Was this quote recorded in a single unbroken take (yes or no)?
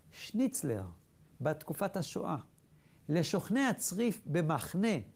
no